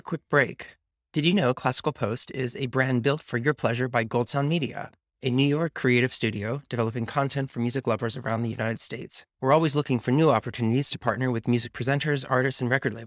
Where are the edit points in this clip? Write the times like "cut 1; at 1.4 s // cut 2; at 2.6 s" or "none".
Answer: cut 1; at 9.3 s

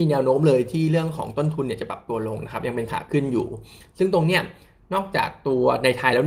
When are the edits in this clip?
none

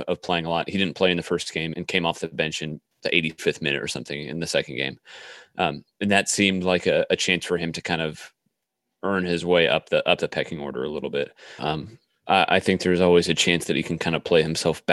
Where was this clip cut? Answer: cut 1; at 1.7 s // cut 2; at 11.6 s

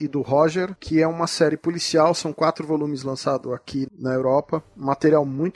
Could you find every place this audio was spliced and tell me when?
none

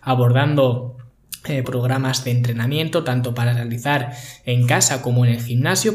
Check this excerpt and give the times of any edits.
cut 1; at 1.6 s

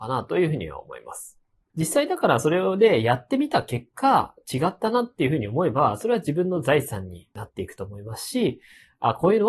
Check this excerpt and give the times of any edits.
cut 1; at 1.7 s

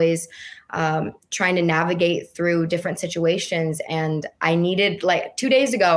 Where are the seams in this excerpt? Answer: none

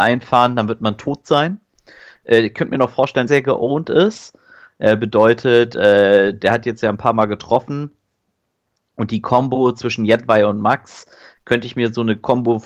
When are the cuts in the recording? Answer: cut 1; at 3.3 s

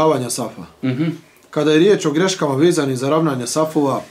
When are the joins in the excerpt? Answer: none

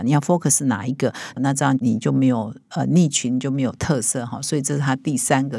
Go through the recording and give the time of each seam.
cut 1; at 1.4 s

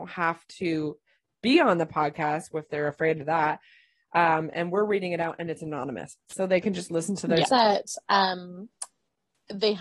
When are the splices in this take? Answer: cut 1; at 7.5 s

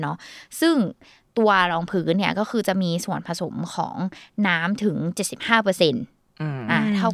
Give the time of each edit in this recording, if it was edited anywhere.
none

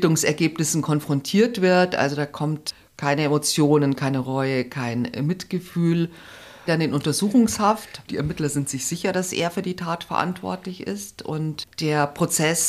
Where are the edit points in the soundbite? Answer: cut 1; at 6.7 s // cut 2; at 8.1 s

